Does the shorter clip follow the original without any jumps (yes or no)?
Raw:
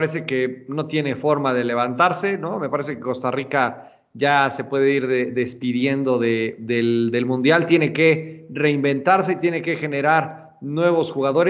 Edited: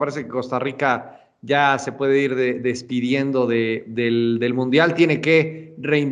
yes